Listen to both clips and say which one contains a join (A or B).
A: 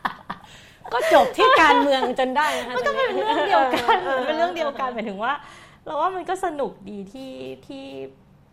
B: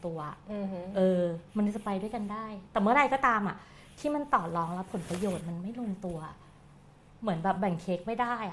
B